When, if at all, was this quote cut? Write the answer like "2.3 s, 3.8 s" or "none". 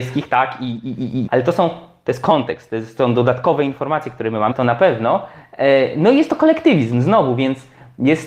1.3 s, 4.5 s